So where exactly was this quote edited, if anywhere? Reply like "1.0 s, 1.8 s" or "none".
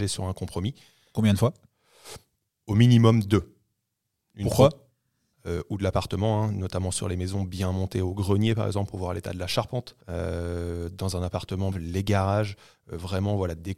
5.3 s, 10.0 s, 11.7 s